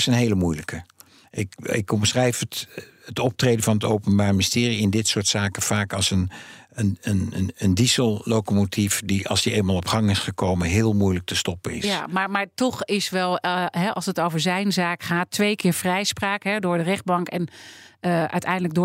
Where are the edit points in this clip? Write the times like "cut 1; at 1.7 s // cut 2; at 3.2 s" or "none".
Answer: none